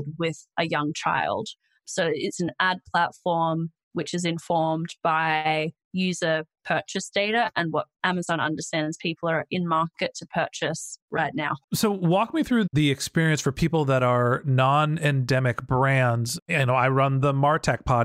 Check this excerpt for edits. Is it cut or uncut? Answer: cut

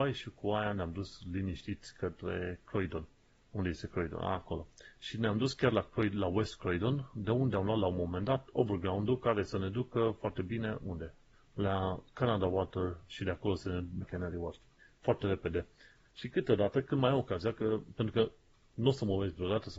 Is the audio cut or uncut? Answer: cut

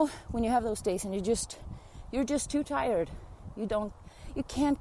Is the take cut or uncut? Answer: cut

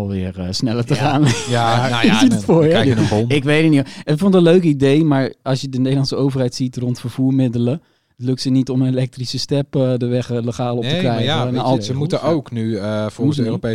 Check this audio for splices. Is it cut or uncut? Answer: cut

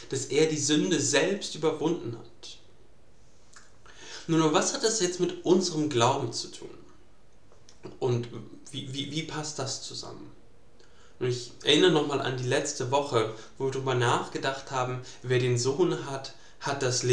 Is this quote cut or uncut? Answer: uncut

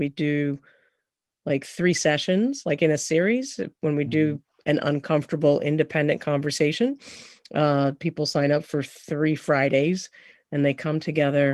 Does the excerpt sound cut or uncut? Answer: uncut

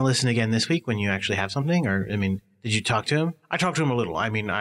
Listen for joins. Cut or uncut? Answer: uncut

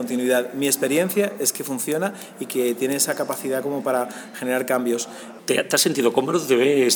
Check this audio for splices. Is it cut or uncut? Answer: cut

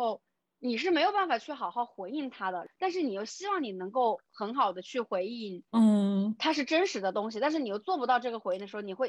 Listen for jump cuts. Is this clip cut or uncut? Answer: uncut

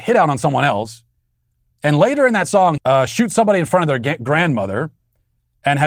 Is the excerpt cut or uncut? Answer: cut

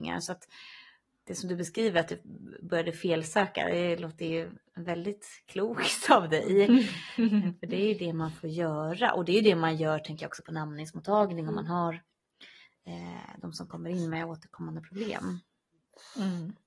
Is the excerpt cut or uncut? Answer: uncut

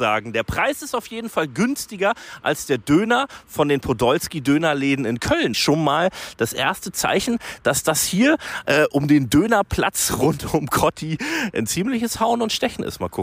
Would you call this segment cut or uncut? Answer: cut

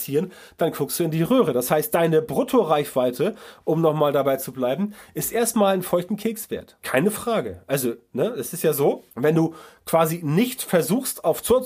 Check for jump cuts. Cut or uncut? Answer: cut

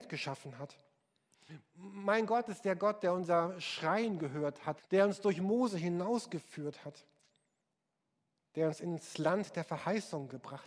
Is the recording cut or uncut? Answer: cut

